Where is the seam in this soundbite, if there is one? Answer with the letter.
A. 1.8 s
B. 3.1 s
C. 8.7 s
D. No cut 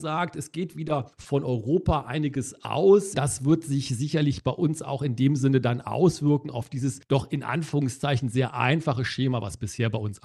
B